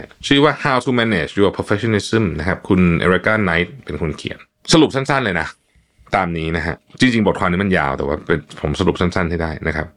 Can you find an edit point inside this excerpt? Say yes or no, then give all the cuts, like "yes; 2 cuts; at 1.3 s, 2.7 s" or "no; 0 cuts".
no; 0 cuts